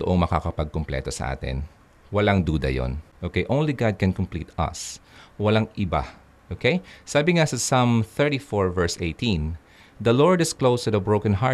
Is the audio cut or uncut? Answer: cut